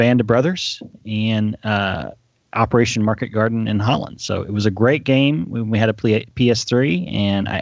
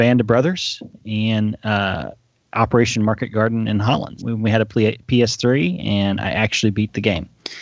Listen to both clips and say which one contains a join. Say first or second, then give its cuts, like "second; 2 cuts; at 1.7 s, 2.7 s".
second; 1 cut; at 4.2 s